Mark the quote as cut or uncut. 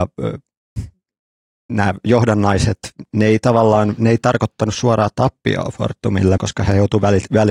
cut